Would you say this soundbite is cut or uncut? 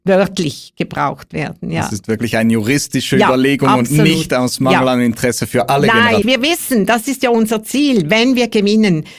cut